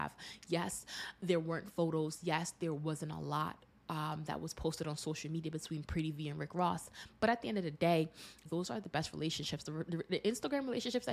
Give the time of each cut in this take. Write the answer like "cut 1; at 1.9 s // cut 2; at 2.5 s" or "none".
cut 1; at 8.5 s